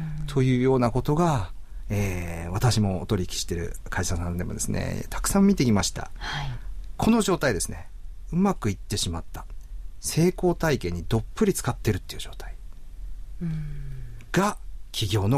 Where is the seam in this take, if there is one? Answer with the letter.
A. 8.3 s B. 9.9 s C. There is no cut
C